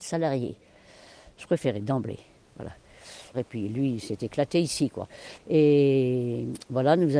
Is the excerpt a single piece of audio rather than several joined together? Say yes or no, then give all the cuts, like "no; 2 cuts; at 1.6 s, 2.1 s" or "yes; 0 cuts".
no; 2 cuts; at 3.3 s, 5.4 s